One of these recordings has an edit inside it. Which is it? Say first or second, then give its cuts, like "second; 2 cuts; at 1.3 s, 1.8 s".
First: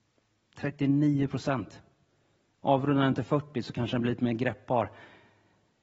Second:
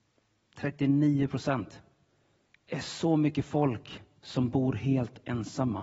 second; 1 cut; at 2.5 s